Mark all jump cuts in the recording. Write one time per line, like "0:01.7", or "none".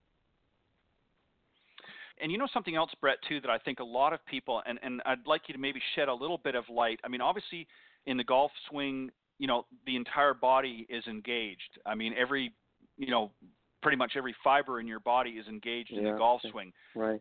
0:02.1